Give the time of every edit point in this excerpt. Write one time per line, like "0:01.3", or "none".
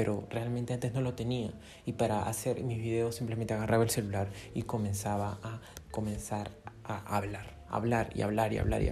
none